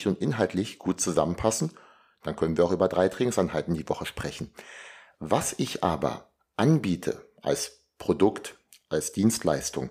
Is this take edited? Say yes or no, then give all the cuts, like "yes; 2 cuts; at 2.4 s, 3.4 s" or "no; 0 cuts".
no; 0 cuts